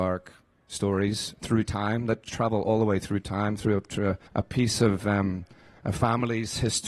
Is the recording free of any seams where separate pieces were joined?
no; 1 cut; at 4.3 s

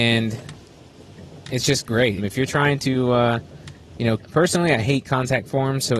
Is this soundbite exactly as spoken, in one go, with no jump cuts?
no; 2 cuts; at 2.2 s, 4.2 s

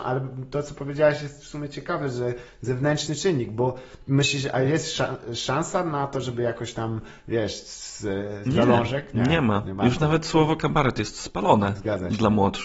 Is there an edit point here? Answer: yes; 1 cut; at 8.5 s

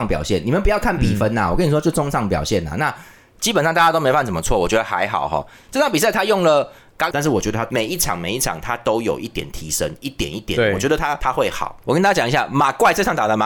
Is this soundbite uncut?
no; 1 cut; at 7.1 s

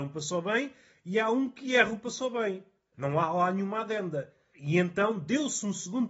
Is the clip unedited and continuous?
yes; 0 cuts

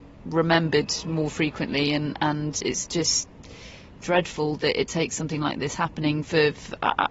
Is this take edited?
no; 0 cuts

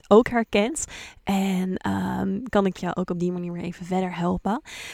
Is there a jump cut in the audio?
no; 0 cuts

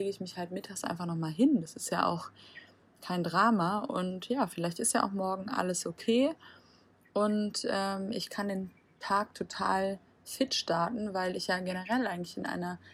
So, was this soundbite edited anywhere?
no; 0 cuts

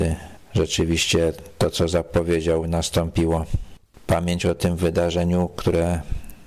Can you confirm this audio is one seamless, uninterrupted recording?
no; 1 cut; at 3.9 s

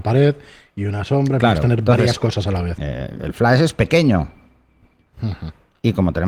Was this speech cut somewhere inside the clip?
yes; 2 cuts; at 2.8 s, 5.1 s

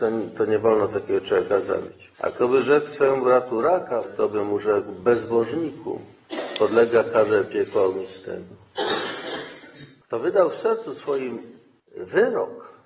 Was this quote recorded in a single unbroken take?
no; 2 cuts; at 2.1 s, 4.0 s

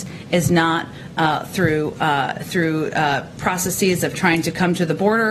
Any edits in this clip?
no; 0 cuts

